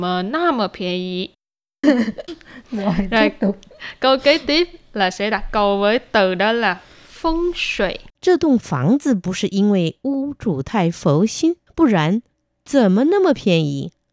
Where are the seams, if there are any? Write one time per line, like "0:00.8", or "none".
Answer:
0:01.8
0:08.2
0:11.7